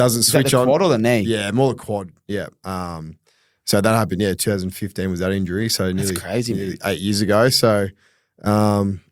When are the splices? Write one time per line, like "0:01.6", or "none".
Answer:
none

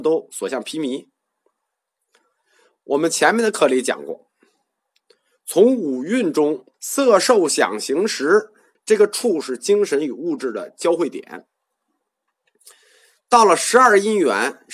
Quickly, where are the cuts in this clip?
0:06.7
0:08.7

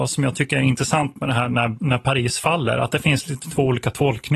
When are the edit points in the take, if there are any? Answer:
none

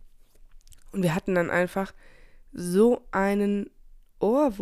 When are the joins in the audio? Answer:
none

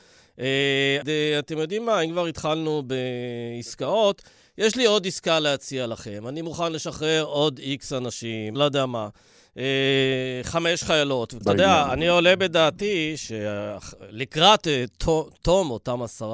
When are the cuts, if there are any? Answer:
0:01.0
0:08.6
0:11.4

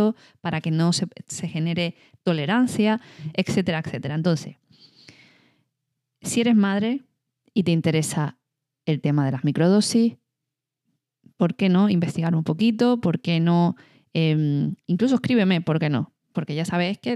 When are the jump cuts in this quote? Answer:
none

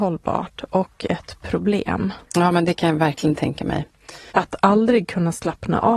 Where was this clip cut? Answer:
0:02.3
0:04.3

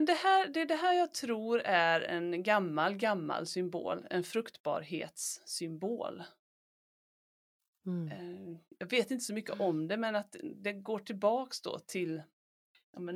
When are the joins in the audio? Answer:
none

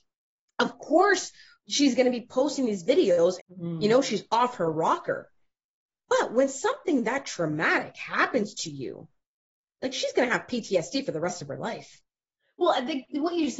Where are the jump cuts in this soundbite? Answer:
0:03.4

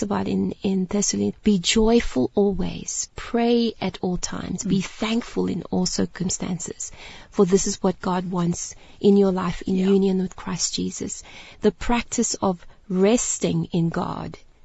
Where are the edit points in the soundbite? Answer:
0:01.3

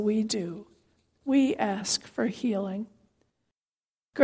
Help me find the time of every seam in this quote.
none

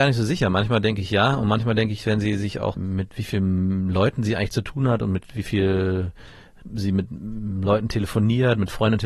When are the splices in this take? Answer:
0:02.7

